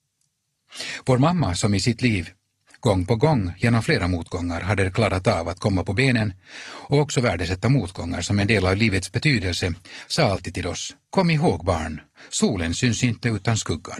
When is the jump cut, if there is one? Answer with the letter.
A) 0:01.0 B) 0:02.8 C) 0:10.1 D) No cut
D